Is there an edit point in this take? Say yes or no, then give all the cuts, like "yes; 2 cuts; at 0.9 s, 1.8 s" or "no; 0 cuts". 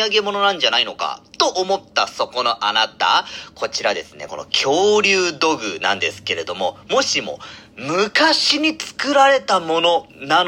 no; 0 cuts